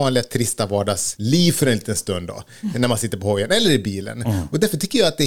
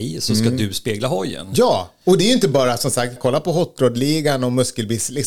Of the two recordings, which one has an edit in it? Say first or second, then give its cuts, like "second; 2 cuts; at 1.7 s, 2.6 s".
second; 1 cut; at 3.2 s